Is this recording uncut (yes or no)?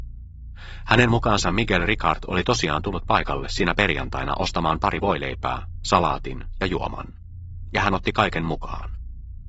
yes